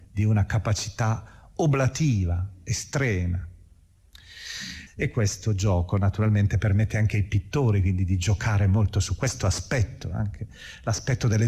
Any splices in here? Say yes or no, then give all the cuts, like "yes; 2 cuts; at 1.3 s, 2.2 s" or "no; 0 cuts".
yes; 1 cut; at 4.9 s